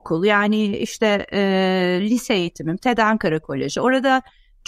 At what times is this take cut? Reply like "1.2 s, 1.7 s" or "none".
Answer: none